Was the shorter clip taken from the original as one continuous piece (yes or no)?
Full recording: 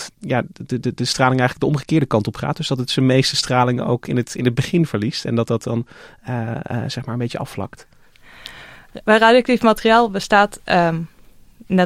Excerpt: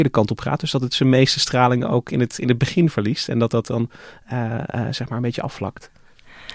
yes